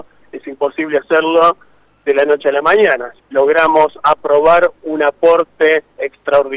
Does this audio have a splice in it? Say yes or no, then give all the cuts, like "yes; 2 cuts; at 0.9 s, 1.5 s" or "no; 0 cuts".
yes; 1 cut; at 3.2 s